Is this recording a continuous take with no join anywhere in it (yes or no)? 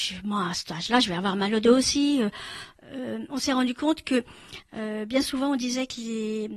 yes